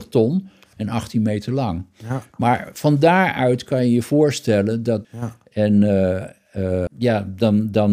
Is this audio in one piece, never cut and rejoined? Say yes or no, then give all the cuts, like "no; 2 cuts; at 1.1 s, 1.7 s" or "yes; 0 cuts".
no; 2 cuts; at 5.0 s, 6.9 s